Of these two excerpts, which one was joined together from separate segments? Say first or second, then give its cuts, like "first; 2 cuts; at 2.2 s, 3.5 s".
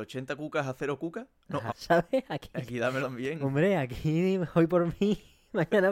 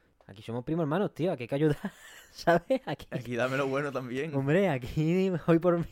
first; 2 cuts; at 1.7 s, 3.0 s